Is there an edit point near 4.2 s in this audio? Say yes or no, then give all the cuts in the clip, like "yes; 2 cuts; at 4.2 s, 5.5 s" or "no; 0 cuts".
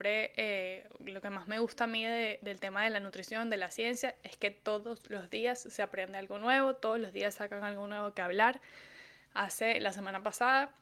no; 0 cuts